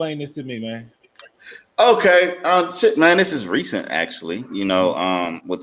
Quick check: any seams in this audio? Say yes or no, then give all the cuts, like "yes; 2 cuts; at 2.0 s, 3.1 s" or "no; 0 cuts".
no; 0 cuts